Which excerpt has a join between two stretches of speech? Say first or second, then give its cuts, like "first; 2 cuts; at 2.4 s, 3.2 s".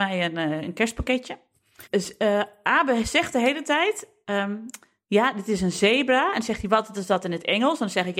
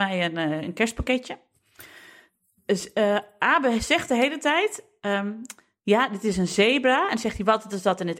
first; 1 cut; at 1.9 s